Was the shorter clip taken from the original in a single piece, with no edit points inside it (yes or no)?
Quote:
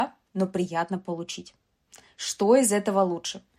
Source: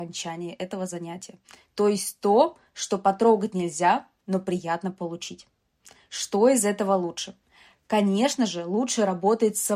yes